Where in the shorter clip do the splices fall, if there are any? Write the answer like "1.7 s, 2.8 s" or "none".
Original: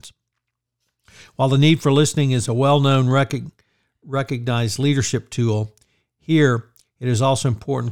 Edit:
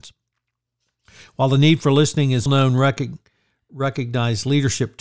2.5 s